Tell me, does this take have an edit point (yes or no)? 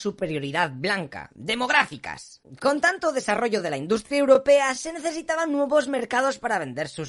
yes